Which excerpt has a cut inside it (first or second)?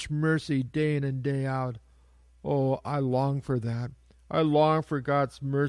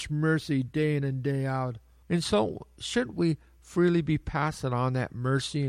second